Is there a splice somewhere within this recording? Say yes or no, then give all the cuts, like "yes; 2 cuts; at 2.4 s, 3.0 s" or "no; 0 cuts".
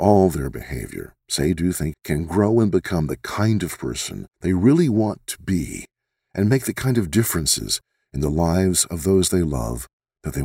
yes; 2 cuts; at 1.9 s, 4.3 s